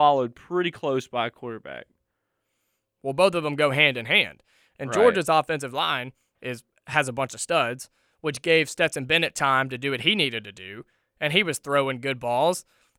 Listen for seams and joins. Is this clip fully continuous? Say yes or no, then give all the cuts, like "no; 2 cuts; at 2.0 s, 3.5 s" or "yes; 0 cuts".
yes; 0 cuts